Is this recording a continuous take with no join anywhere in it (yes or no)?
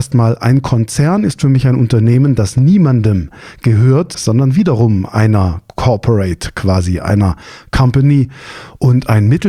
no